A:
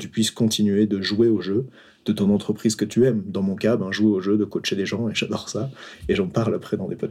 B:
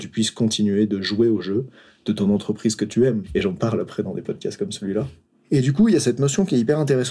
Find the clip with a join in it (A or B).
B